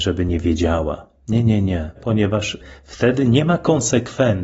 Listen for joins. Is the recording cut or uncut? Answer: cut